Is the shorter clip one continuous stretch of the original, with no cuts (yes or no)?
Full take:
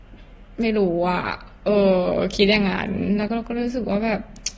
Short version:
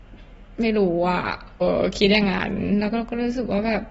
no